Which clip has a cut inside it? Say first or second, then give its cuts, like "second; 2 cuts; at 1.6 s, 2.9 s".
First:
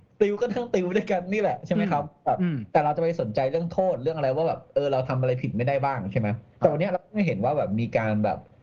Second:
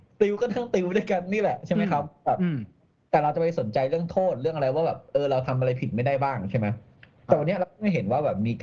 first; 2 cuts; at 2.7 s, 6.5 s